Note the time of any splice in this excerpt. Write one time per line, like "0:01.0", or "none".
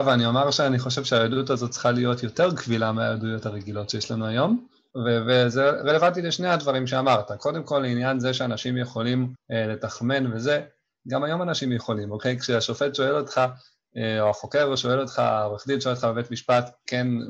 0:09.3